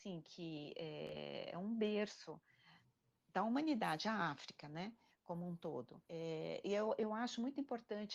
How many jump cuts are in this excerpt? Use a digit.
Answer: 1